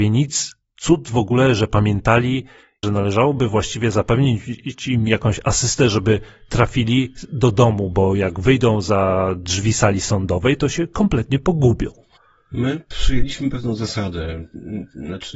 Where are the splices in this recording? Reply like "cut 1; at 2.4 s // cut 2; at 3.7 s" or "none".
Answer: cut 1; at 2.8 s

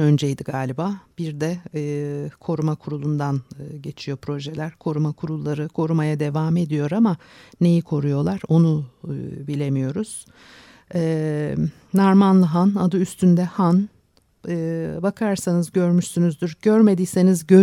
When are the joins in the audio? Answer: none

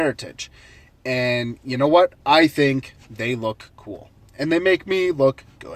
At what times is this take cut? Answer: none

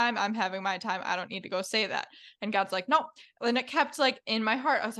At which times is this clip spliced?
none

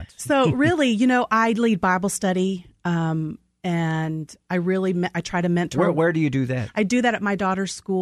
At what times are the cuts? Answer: none

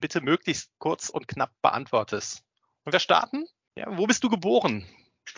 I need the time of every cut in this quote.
cut 1; at 3.7 s

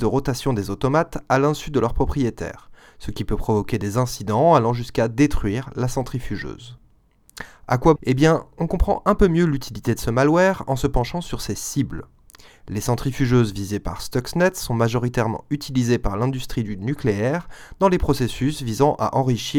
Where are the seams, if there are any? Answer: cut 1; at 8.0 s

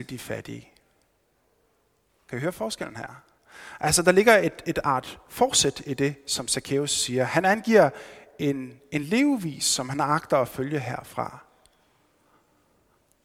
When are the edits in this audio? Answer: none

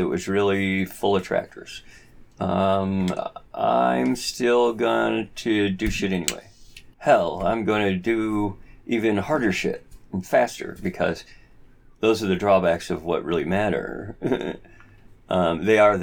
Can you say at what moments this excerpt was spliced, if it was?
cut 1; at 6.9 s

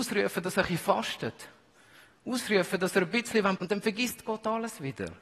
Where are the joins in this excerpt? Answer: cut 1; at 3.6 s

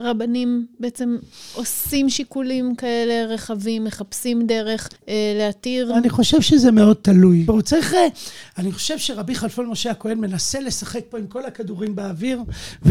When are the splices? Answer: cut 1; at 5.0 s // cut 2; at 7.5 s

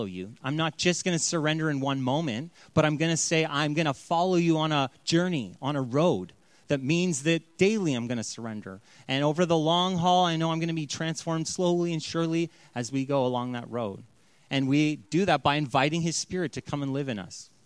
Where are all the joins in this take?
none

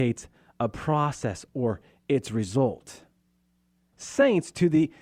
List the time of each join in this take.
cut 1; at 3.9 s

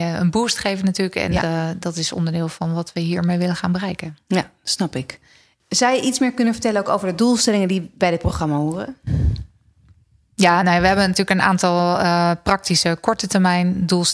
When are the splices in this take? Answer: cut 1; at 1.4 s

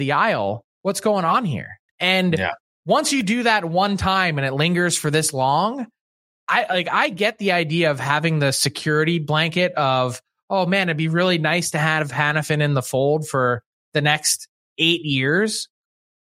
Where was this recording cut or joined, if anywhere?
cut 1; at 1.9 s

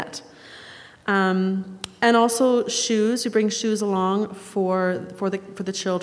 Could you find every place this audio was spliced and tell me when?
none

